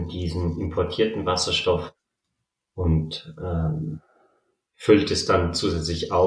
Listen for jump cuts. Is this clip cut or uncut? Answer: uncut